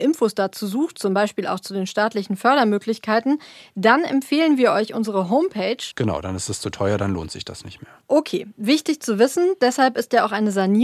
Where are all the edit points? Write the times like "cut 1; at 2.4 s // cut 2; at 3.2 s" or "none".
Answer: cut 1; at 5.9 s // cut 2; at 8.0 s